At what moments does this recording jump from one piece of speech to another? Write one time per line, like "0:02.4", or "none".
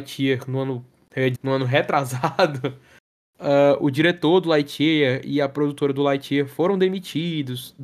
0:01.4